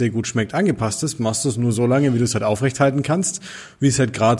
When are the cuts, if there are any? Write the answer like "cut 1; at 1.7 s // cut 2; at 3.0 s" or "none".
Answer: none